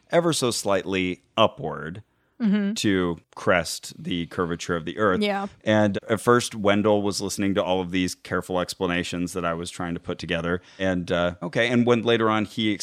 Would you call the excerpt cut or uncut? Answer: cut